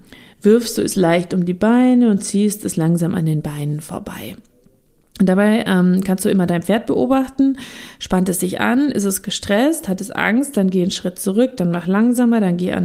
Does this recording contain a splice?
no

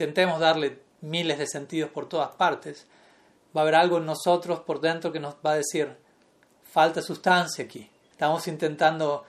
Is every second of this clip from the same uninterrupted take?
no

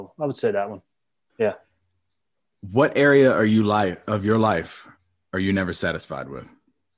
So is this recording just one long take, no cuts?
no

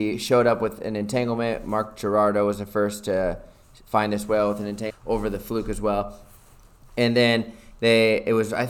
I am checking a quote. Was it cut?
yes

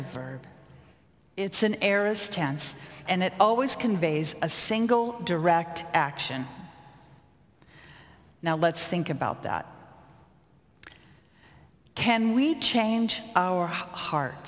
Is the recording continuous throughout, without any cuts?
no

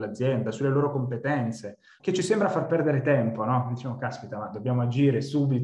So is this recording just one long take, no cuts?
no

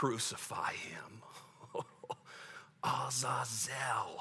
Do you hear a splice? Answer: no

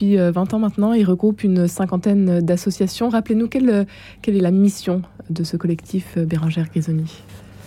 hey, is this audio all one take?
yes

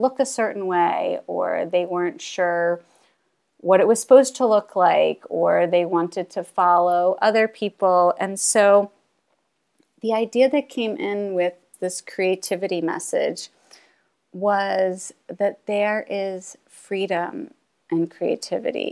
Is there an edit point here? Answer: no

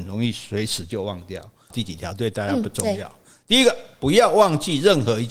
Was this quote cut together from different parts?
yes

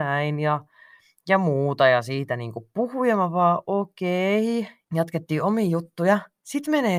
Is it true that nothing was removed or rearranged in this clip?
no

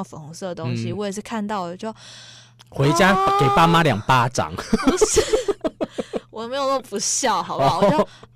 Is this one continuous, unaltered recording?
yes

